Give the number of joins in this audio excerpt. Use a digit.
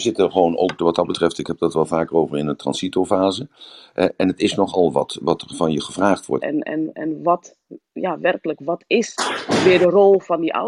1